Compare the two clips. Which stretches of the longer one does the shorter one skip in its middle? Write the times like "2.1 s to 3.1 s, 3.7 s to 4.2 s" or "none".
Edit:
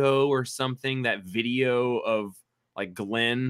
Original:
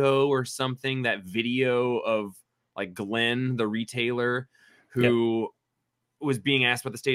none